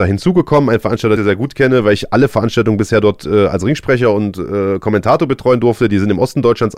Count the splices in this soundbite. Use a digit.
1